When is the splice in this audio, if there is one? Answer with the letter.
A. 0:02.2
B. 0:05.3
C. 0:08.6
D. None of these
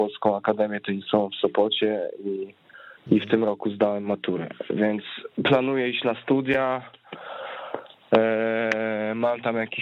B